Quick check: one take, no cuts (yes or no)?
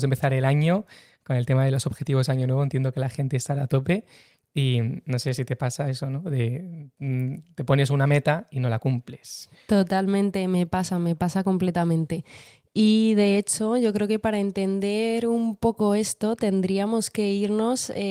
yes